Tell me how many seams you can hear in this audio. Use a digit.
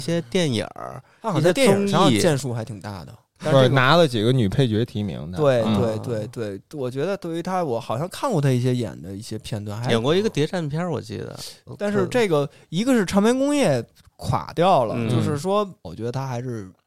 2